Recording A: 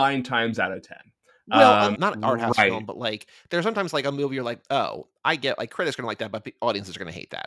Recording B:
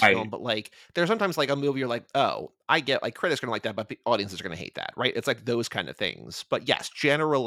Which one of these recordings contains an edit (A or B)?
A